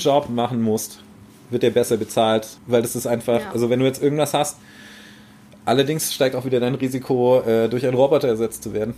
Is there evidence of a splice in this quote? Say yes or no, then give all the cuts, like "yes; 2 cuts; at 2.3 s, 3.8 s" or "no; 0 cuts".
yes; 1 cut; at 2.6 s